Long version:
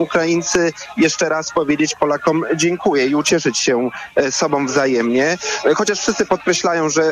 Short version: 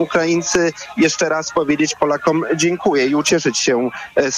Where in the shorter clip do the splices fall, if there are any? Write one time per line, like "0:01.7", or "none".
none